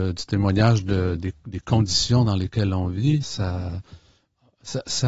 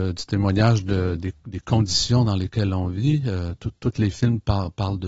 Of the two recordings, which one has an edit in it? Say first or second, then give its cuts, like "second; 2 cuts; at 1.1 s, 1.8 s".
first; 1 cut; at 3.2 s